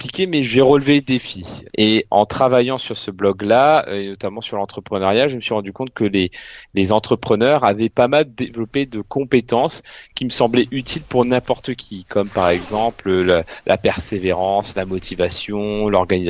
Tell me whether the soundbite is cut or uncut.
cut